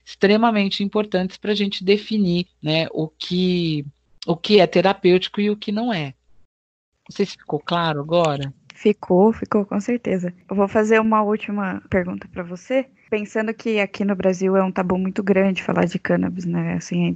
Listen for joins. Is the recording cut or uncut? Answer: uncut